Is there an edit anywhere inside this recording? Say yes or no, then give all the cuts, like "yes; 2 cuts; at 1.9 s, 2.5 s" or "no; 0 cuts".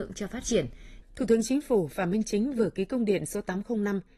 yes; 1 cut; at 1.0 s